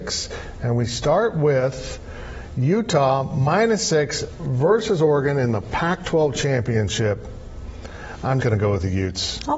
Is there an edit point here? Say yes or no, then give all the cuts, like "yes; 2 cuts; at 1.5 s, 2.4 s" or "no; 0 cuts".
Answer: yes; 1 cut; at 8.4 s